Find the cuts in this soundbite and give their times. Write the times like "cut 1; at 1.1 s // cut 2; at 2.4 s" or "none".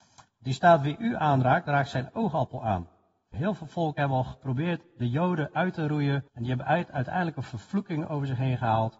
cut 1; at 3.3 s // cut 2; at 6.3 s